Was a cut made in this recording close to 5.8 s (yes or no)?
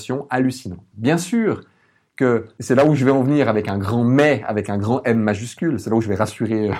no